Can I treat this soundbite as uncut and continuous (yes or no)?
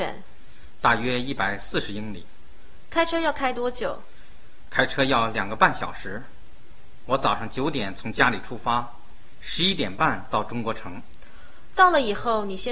yes